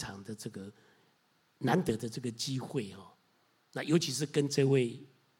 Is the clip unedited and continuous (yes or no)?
yes